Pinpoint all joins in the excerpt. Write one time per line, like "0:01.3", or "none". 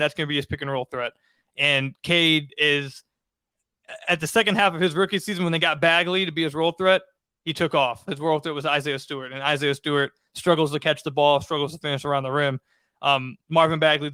0:08.1